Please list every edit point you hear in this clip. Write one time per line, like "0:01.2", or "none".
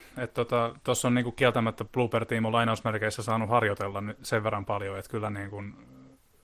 none